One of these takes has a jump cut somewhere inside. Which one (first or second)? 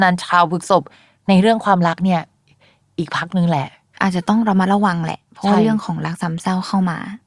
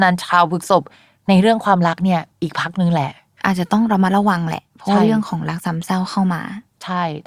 second